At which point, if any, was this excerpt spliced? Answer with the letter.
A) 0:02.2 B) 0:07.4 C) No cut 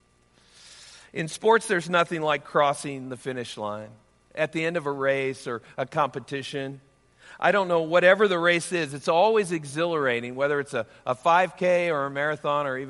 C